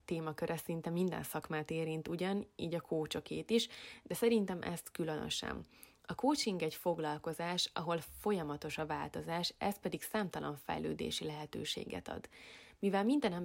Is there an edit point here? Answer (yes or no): no